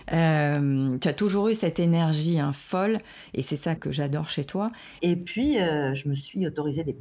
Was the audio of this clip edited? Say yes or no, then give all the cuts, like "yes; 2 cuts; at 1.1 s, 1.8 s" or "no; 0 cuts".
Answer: yes; 2 cuts; at 3.8 s, 5.0 s